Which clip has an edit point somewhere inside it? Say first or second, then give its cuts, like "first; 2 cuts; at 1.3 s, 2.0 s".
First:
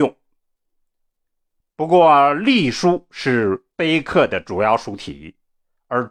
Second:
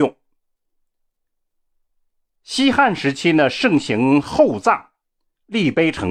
first; 1 cut; at 1.6 s